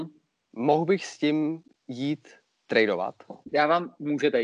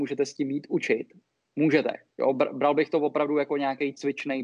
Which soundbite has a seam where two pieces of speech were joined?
first; 1 cut; at 3.4 s

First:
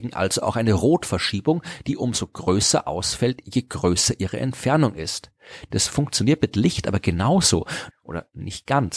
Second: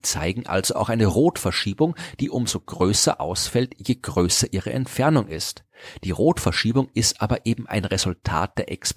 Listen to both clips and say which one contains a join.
first; 2 cuts; at 5.7 s, 7.9 s

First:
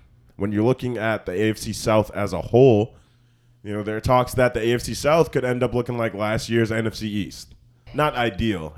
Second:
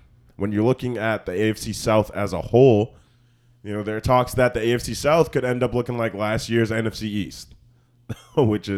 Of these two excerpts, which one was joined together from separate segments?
first; 1 cut; at 7.9 s

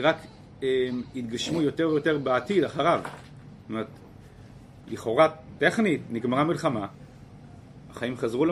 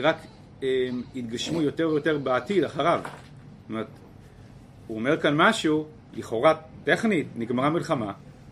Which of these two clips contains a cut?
first; 1 cut; at 4.8 s

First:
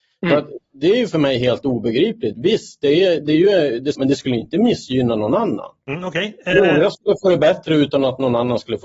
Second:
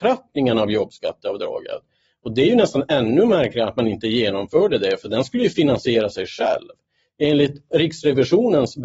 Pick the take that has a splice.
first; 1 cut; at 3.9 s

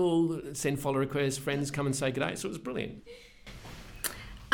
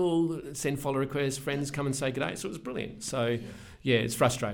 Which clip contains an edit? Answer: first; 1 cut; at 3.0 s

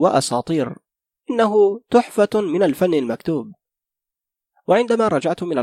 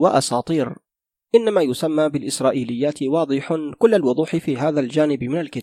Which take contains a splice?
second; 1 cut; at 1.2 s

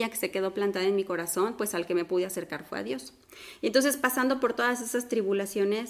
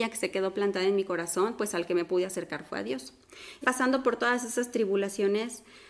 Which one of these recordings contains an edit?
second; 1 cut; at 3.6 s

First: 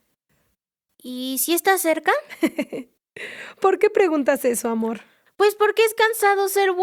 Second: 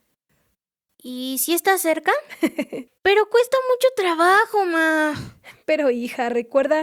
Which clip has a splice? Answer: second; 1 cut; at 2.9 s

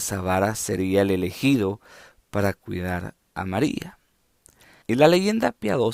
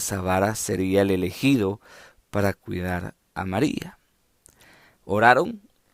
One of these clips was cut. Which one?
first; 1 cut; at 4.8 s

